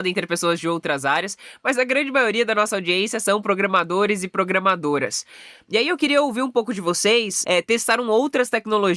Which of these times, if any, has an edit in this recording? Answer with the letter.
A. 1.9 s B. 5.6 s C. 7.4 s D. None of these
C